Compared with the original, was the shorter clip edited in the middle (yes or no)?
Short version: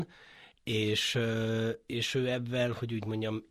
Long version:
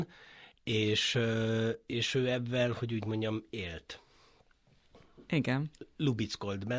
no